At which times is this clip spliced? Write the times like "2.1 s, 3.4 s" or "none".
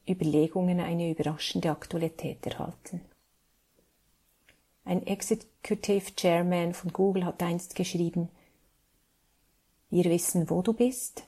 none